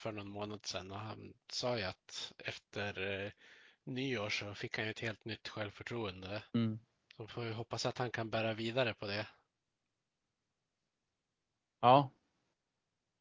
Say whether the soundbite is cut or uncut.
cut